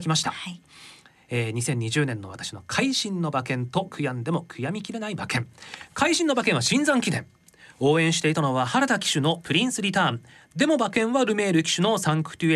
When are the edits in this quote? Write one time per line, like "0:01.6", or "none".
none